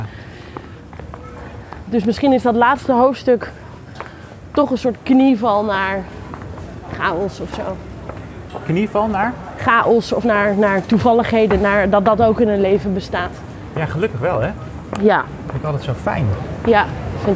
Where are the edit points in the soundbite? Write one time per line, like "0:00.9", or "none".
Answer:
none